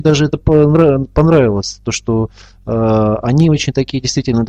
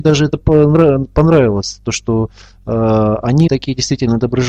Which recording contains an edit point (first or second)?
second